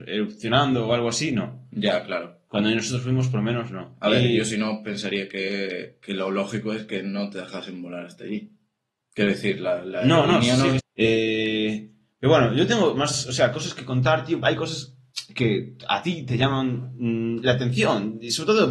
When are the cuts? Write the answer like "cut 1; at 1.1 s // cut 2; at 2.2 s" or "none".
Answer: cut 1; at 10.8 s // cut 2; at 14.4 s